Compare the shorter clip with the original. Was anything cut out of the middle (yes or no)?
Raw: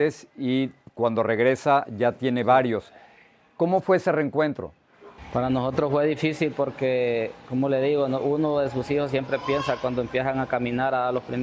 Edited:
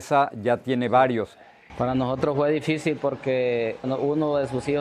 yes